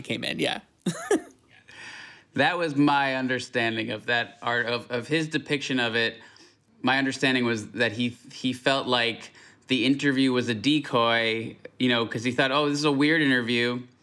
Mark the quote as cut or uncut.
uncut